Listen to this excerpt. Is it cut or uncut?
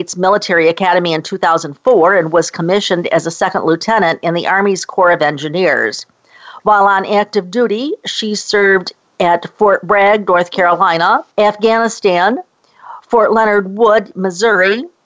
cut